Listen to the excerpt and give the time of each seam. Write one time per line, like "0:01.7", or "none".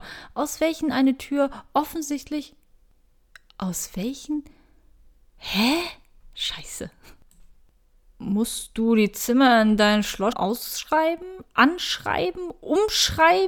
0:10.3